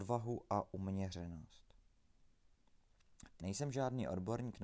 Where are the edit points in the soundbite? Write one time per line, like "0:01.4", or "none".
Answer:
0:03.4